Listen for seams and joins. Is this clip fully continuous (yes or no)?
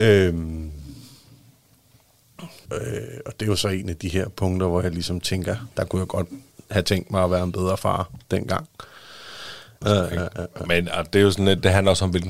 no